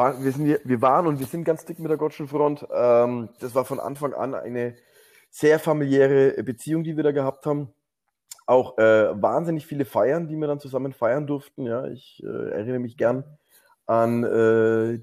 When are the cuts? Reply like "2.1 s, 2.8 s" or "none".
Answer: 3.4 s